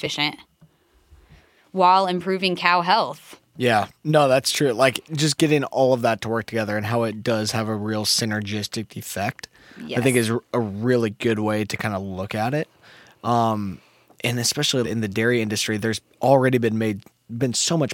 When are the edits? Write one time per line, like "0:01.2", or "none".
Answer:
0:14.8